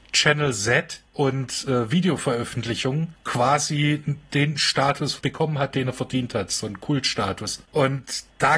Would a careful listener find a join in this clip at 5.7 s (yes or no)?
no